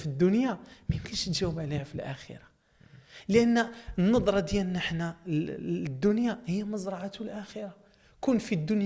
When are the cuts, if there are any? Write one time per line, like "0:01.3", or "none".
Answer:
none